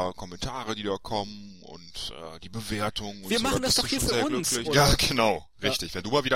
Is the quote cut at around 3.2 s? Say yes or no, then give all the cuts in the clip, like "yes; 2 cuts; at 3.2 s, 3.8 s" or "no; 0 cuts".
no; 1 cut; at 4.6 s